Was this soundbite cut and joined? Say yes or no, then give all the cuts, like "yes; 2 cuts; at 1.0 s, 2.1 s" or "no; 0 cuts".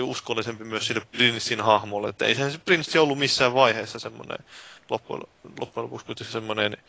no; 0 cuts